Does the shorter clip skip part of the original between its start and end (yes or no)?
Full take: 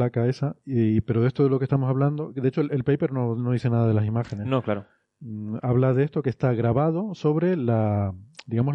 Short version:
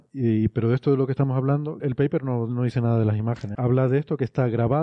yes